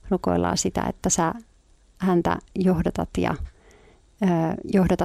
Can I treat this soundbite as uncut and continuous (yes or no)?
yes